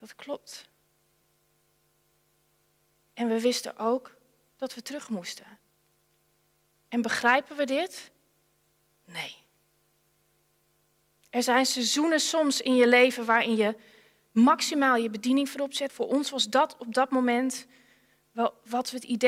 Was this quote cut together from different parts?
yes; 1 cut; at 15.9 s

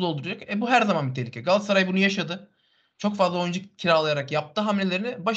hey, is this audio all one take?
yes; 0 cuts

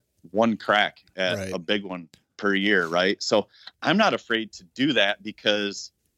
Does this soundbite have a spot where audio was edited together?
no; 0 cuts

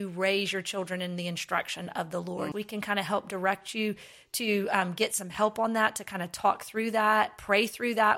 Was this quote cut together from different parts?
yes; 1 cut; at 2.5 s

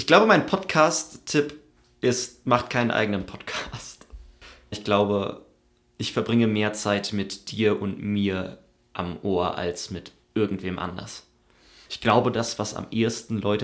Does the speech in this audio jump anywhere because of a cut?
yes; 2 cuts; at 4.7 s, 11.8 s

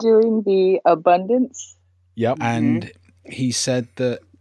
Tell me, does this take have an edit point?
yes; 1 cut; at 2.4 s

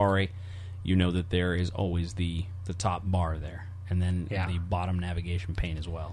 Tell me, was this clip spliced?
no; 0 cuts

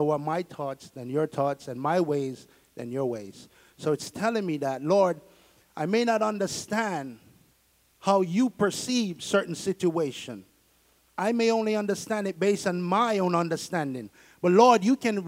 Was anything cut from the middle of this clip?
no; 0 cuts

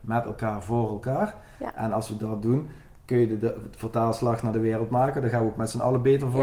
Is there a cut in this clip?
no; 0 cuts

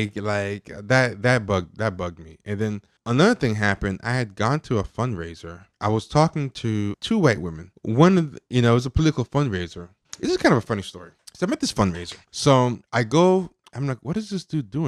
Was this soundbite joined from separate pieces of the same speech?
yes; 1 cut; at 12.3 s

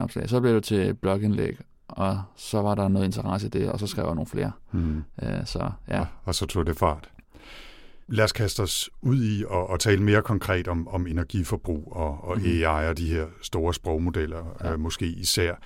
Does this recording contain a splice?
yes; 1 cut; at 8.0 s

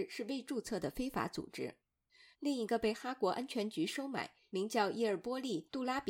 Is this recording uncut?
no; 1 cut; at 2.3 s

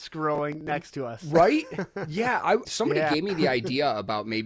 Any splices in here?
yes; 1 cut; at 2.6 s

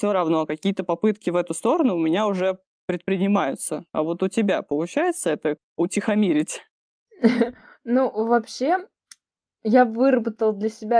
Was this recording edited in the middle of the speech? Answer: yes; 1 cut; at 5.6 s

